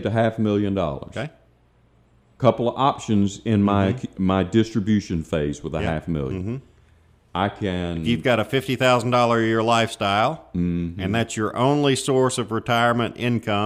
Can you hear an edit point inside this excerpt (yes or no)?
no